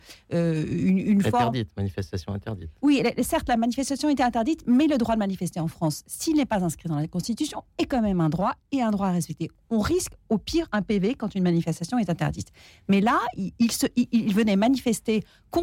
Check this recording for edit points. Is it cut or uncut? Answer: uncut